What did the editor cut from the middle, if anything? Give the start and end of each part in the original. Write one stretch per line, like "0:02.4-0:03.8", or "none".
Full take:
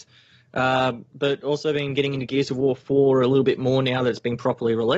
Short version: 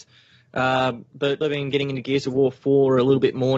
0:01.4-0:01.6